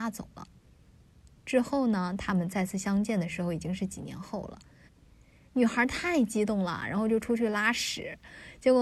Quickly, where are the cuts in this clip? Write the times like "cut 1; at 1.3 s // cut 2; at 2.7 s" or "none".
cut 1; at 4.9 s